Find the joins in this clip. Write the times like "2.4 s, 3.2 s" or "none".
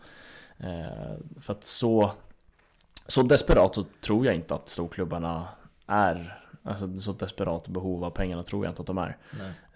none